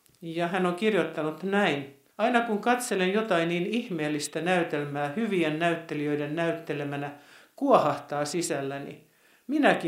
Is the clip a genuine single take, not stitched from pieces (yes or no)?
no